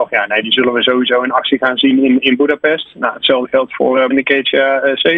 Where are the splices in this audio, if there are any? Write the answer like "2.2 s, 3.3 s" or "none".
4.1 s